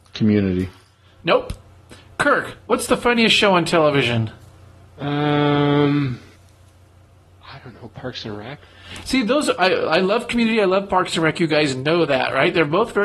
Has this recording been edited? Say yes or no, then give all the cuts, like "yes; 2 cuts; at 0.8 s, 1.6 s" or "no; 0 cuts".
no; 0 cuts